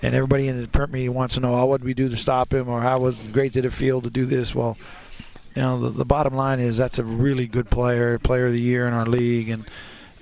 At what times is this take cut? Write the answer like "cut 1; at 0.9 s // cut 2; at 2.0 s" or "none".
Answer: none